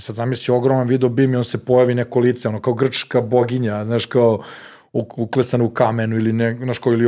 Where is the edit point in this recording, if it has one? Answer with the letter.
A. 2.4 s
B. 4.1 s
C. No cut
C